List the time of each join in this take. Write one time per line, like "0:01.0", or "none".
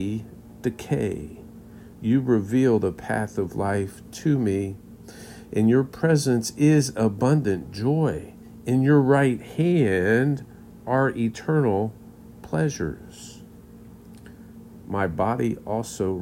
0:14.8